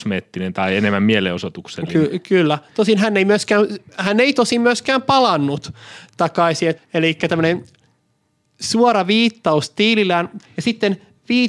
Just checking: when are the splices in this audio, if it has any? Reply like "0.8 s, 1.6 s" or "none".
6.8 s, 10.4 s